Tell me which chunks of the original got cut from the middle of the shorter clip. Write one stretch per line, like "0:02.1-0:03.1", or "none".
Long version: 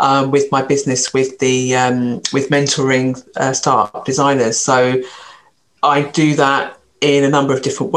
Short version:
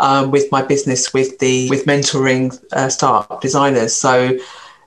0:01.7-0:02.3